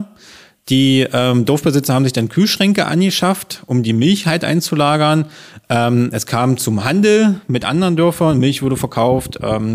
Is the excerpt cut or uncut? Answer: uncut